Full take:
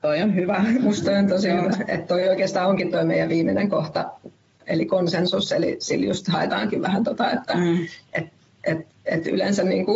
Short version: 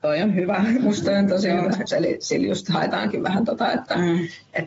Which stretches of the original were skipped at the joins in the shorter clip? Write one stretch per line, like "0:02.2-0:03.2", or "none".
0:01.9-0:05.5